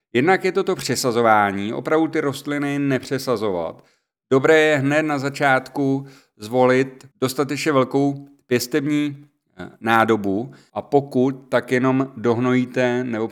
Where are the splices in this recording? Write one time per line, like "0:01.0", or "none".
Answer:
0:07.1
0:10.7

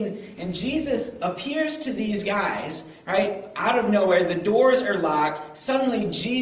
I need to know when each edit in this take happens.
none

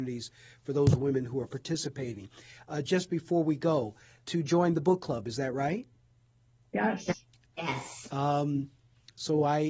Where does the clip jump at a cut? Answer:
0:04.2
0:08.1

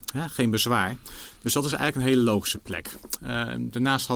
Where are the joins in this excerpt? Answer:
none

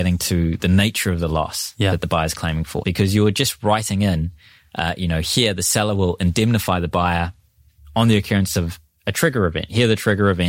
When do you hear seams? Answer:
0:02.8

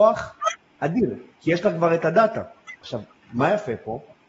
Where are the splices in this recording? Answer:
0:02.8

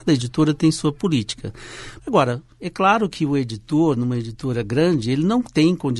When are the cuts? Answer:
0:02.0

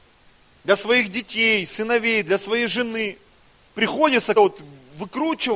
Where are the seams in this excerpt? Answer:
0:04.4

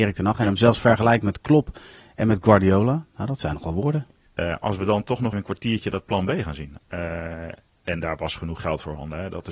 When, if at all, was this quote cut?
0:04.3
0:05.3
0:06.8

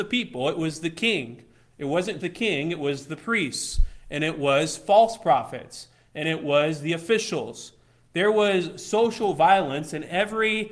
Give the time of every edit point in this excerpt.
0:02.2

